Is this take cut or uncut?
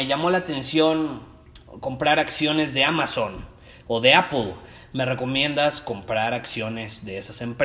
uncut